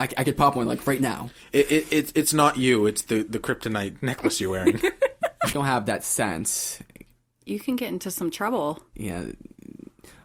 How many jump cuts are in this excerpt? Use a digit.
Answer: 1